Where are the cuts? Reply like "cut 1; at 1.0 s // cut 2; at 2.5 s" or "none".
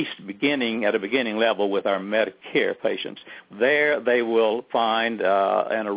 cut 1; at 3.5 s